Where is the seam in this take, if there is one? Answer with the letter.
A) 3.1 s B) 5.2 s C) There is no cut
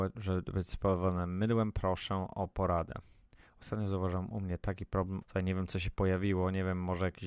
B